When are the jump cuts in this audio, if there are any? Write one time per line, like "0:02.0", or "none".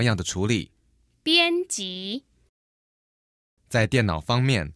0:03.6

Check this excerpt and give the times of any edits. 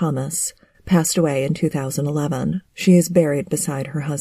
0:02.6

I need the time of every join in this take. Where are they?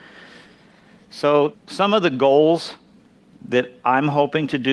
0:01.5

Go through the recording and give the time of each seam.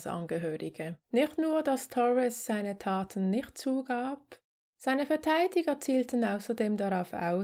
0:01.0

